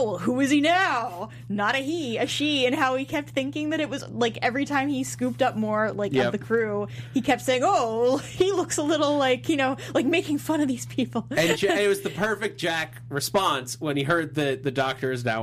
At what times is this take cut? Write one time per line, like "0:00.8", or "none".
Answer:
none